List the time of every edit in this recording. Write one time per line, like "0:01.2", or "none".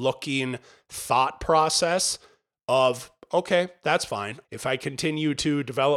0:04.4